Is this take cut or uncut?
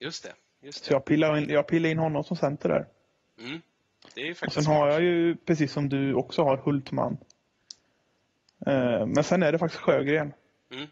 uncut